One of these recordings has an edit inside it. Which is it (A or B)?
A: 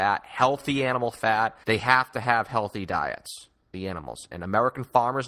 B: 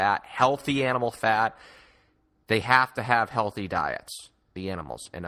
A